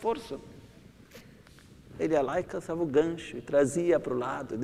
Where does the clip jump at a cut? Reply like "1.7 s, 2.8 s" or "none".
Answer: 2.0 s